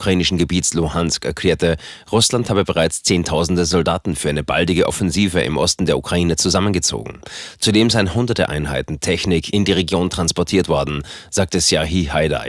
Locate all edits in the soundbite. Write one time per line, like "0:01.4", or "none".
none